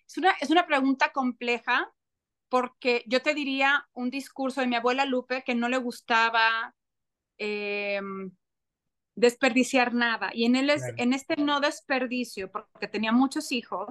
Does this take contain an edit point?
no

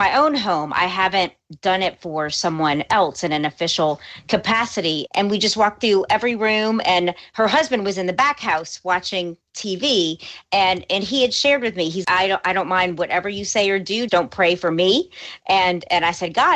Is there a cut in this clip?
yes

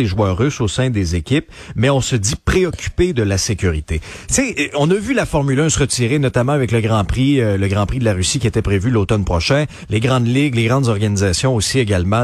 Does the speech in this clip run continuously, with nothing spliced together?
yes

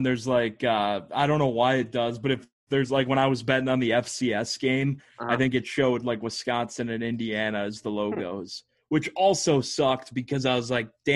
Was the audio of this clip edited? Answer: no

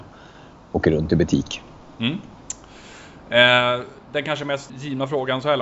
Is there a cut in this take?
yes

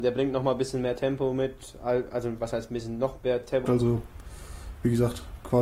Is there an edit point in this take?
yes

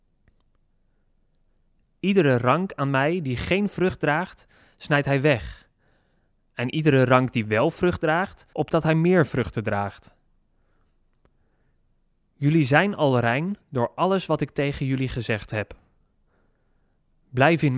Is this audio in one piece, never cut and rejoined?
no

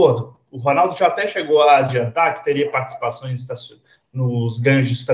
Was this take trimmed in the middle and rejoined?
no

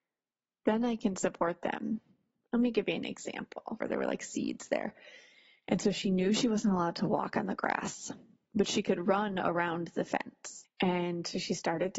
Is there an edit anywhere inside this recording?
yes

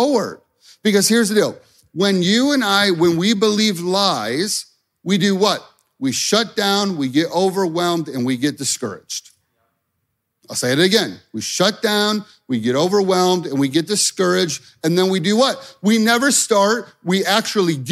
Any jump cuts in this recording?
no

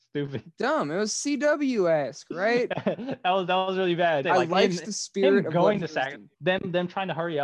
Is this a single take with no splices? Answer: no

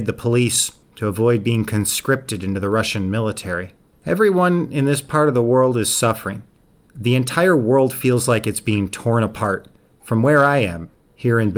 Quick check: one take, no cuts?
yes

